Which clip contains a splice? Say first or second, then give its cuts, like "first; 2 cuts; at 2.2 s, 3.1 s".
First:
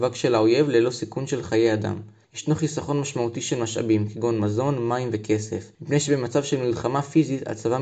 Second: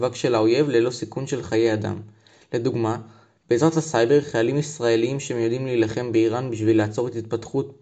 first; 2 cuts; at 2.2 s, 5.7 s